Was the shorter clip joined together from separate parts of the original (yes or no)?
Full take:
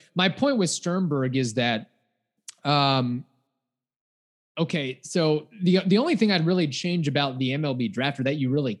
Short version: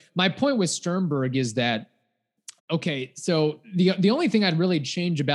yes